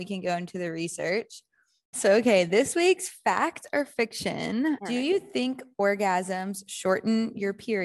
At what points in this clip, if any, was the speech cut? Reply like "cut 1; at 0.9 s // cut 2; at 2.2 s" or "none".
cut 1; at 1.9 s // cut 2; at 4.8 s